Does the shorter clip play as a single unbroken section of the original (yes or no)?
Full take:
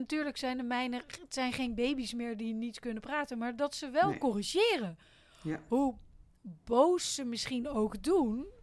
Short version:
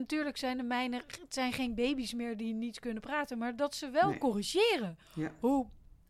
no